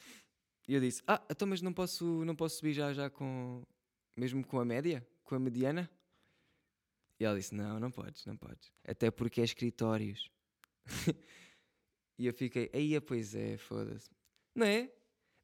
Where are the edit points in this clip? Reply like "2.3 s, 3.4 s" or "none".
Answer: 8.8 s, 14.4 s